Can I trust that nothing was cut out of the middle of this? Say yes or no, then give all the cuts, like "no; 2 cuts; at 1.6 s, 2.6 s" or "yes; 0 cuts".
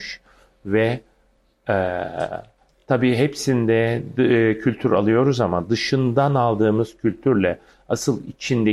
yes; 0 cuts